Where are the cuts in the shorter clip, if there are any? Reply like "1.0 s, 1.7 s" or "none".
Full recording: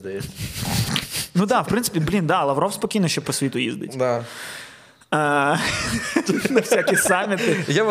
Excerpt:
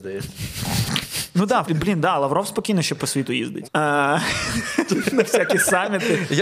1.7 s, 3.6 s